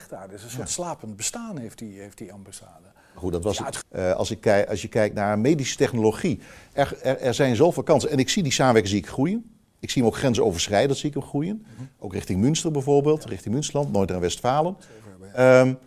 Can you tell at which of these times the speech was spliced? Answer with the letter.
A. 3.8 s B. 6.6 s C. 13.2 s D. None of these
A